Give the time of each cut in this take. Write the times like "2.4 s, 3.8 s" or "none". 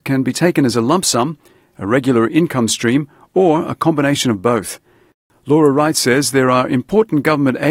none

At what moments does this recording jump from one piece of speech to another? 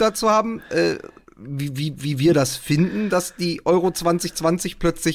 none

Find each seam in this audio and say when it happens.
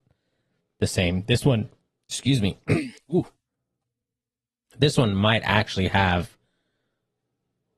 none

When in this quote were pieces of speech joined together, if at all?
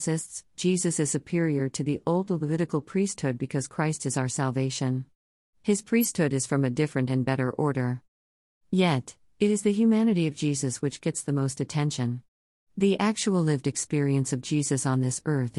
8.5 s

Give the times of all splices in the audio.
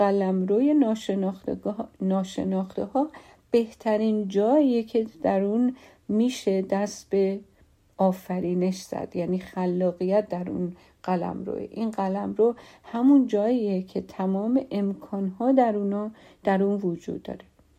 none

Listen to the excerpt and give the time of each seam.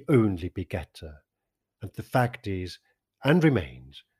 1.6 s

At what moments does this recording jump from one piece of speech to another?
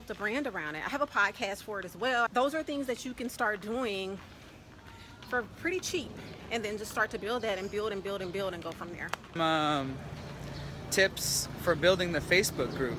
2.3 s, 9.4 s

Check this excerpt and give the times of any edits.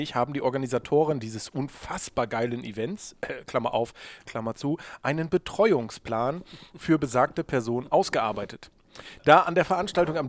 4.3 s, 9.2 s

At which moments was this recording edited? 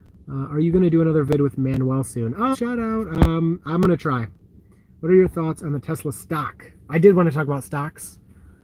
2.5 s

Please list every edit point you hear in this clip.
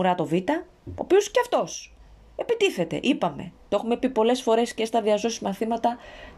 none

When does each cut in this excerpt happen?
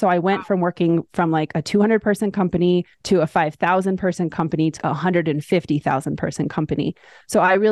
2.9 s, 4.8 s

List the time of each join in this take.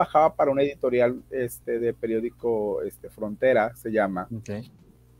none

